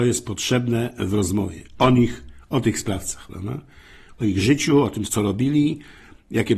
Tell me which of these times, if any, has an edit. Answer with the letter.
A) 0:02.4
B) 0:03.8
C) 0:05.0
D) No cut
C